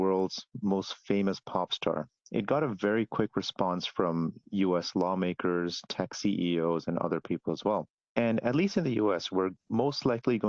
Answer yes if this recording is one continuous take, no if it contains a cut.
yes